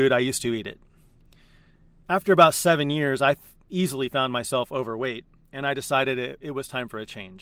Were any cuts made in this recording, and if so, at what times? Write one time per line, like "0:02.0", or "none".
none

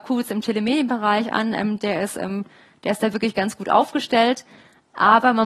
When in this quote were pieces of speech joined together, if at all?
none

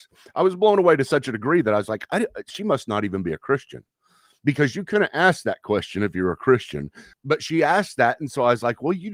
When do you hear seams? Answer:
0:07.1

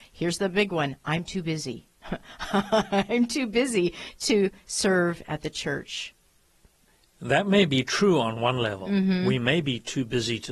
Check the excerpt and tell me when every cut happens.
none

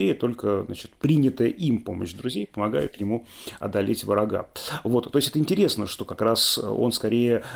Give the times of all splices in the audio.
none

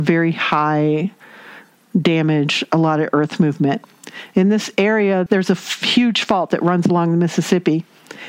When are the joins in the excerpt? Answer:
0:05.3

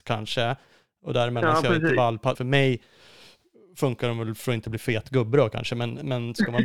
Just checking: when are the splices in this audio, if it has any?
0:02.3

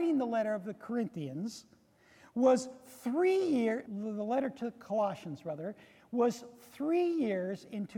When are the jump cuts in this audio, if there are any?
0:03.9

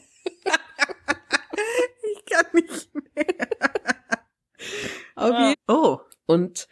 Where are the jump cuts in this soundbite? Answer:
0:05.5

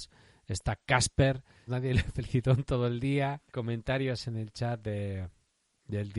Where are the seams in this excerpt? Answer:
0:01.7
0:03.5

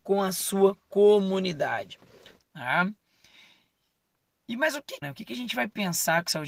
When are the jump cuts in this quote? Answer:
0:02.4
0:05.0

